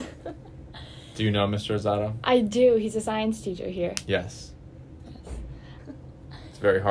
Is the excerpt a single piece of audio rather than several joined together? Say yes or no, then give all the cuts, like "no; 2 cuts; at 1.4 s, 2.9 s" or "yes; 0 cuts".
no; 1 cut; at 5.8 s